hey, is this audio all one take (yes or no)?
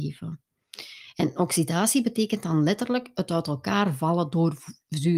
no